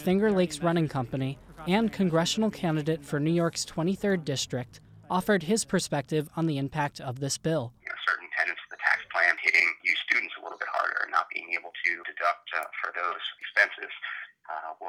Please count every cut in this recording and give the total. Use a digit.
0